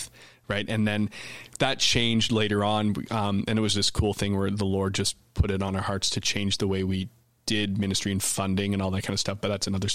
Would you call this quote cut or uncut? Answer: uncut